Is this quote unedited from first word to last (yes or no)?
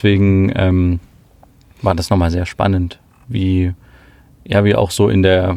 yes